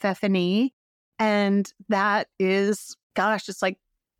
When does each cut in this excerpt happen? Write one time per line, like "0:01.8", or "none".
0:03.0